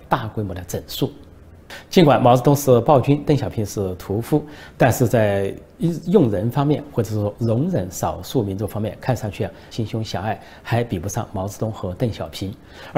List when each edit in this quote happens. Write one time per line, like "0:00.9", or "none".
0:09.7